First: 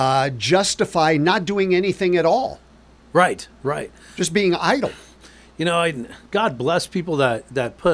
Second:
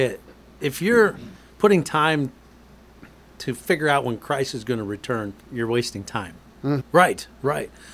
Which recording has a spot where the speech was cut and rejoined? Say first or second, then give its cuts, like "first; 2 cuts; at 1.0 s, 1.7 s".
second; 2 cuts; at 5.4 s, 6.8 s